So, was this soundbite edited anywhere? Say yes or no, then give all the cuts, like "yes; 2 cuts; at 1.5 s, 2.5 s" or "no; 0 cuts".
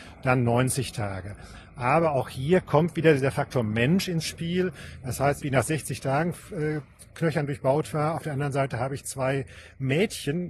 yes; 1 cut; at 5.4 s